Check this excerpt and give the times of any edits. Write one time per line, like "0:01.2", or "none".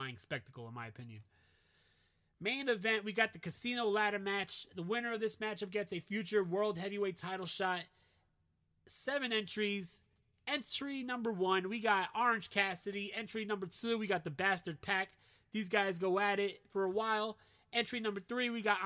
none